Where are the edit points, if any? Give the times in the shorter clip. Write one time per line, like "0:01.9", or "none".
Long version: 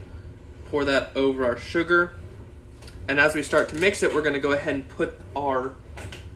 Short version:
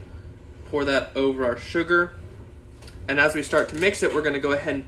none